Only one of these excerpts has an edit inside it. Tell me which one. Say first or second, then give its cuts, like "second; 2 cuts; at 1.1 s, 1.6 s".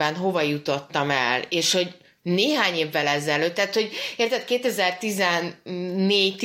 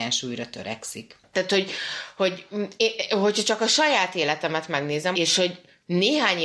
second; 2 cuts; at 1.3 s, 5.1 s